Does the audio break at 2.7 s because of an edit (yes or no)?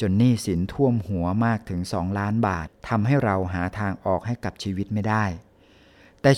yes